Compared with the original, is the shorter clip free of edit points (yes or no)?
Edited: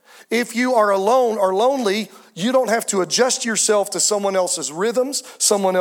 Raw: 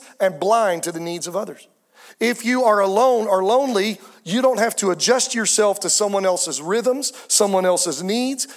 yes